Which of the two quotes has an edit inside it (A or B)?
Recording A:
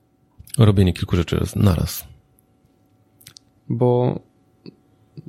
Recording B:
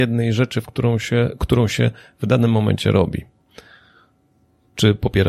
A